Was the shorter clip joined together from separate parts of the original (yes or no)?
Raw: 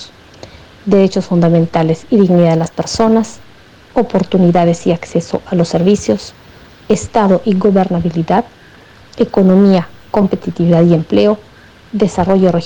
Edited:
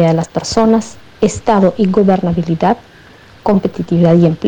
yes